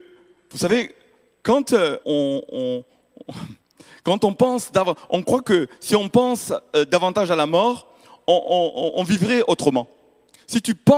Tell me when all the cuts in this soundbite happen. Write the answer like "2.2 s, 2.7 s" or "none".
2.0 s